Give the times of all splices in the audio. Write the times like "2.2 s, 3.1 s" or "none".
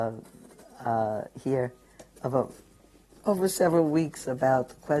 none